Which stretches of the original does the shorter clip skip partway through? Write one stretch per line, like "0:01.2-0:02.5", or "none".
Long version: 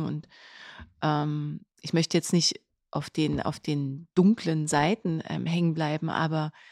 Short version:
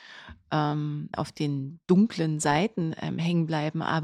0:01.6-0:03.4